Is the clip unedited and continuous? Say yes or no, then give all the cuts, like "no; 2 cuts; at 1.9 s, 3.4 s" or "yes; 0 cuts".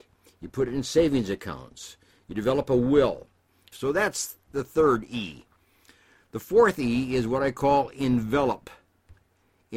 no; 1 cut; at 3.7 s